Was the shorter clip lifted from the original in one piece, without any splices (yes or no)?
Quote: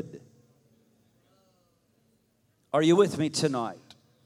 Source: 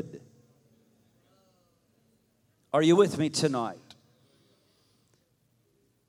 yes